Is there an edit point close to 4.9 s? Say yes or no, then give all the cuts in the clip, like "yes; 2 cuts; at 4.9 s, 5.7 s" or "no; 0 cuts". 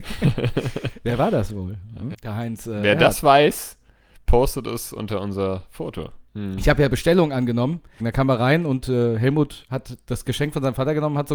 no; 3 cuts; at 2.1 s, 6.3 s, 8.0 s